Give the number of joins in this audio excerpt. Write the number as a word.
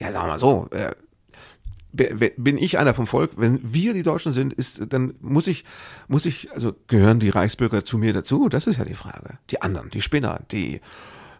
zero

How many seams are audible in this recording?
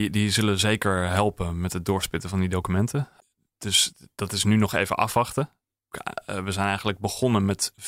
one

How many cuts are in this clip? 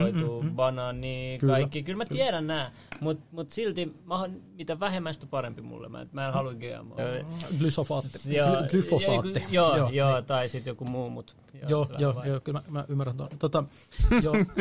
one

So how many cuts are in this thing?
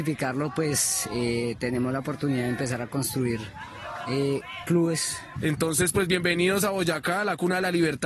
one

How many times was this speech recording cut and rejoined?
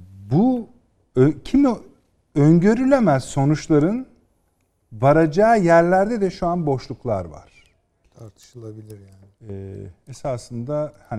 one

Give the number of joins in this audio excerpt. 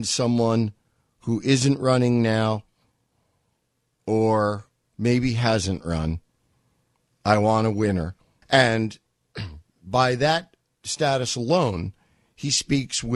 one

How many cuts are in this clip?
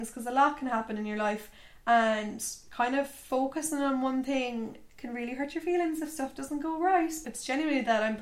two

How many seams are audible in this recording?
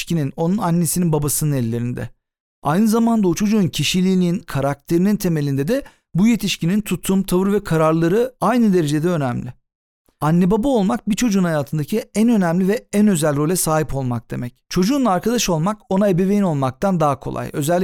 one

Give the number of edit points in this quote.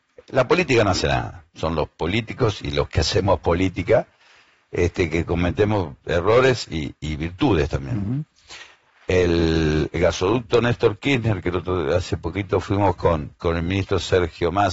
zero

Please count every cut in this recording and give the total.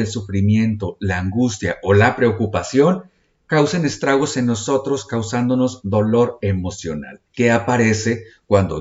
one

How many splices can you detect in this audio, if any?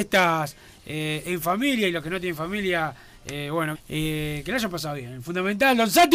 one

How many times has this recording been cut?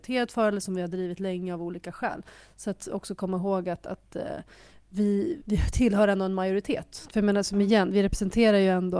two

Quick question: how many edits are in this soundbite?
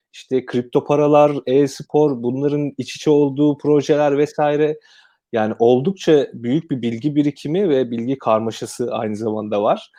zero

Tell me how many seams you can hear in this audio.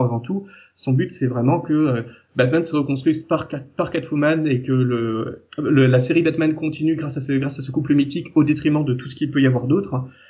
one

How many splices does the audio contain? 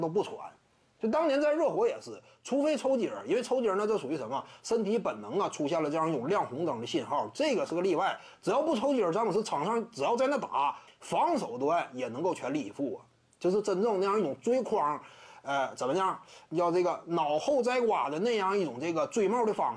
one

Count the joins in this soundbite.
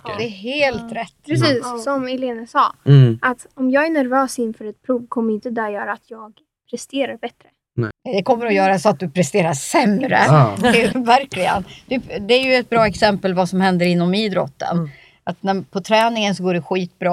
two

